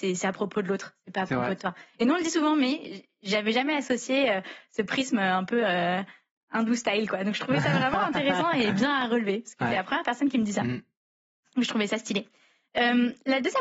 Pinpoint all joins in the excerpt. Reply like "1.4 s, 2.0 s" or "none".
none